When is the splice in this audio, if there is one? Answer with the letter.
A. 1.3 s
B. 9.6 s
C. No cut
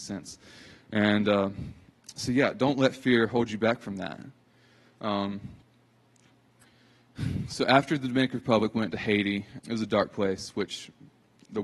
B